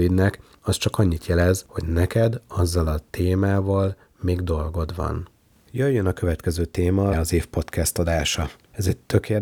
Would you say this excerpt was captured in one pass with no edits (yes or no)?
no